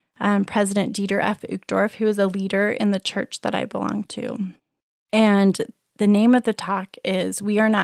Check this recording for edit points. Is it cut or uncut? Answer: uncut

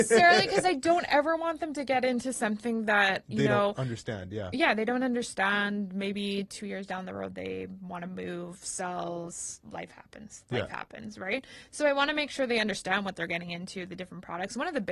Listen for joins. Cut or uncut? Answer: uncut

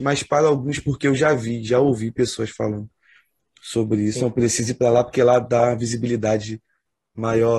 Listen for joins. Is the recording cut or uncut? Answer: uncut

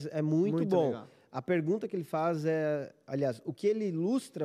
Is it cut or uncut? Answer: uncut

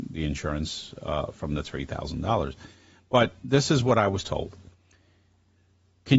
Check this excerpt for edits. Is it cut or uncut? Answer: uncut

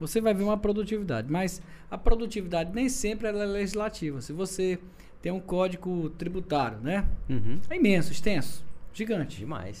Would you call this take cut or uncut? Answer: uncut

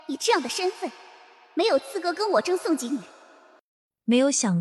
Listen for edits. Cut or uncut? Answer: cut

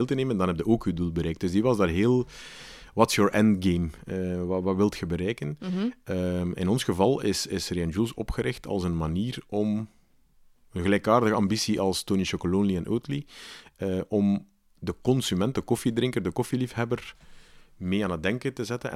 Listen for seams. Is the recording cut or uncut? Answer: uncut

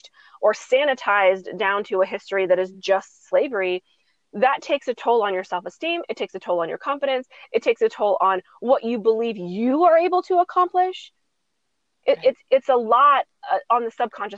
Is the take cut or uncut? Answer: uncut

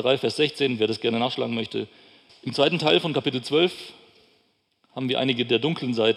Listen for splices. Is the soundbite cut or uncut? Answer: cut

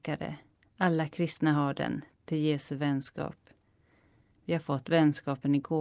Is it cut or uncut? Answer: cut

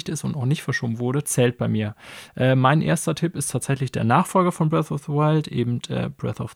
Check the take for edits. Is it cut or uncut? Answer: cut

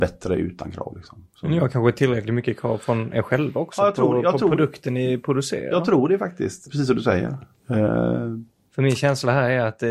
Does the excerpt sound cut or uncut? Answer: cut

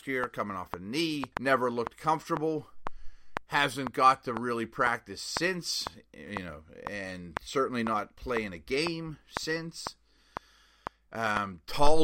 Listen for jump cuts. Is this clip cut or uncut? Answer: cut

